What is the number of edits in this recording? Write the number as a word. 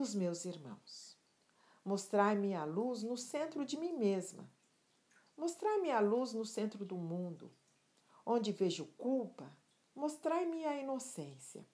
zero